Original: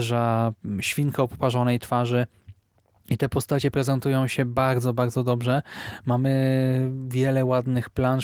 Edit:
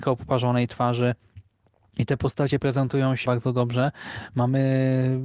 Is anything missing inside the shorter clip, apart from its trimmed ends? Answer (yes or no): yes